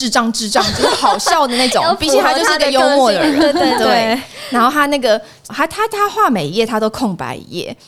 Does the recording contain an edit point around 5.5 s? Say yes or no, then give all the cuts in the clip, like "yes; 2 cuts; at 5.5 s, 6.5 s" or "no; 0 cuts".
yes; 1 cut; at 5.5 s